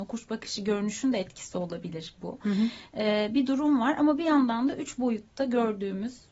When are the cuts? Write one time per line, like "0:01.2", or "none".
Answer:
none